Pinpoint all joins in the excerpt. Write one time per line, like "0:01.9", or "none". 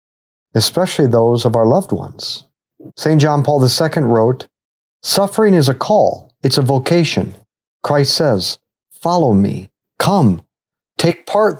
0:02.9